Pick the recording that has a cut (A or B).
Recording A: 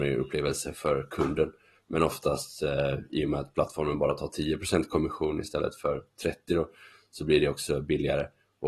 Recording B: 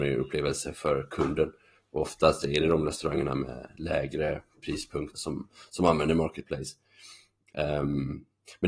B